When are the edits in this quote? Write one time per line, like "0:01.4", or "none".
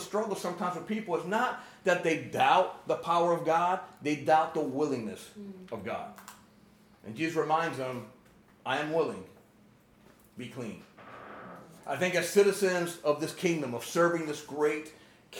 none